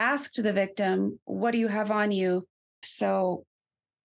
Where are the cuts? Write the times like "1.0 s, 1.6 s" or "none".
2.8 s